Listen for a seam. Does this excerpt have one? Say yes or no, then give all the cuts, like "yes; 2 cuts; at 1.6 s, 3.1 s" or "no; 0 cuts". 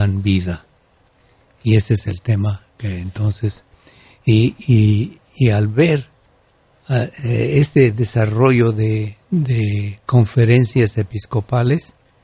no; 0 cuts